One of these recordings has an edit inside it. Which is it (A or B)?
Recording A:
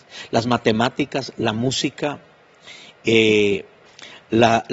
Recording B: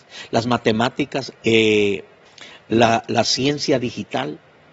B